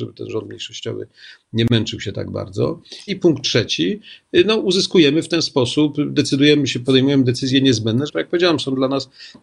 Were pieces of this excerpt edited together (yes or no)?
yes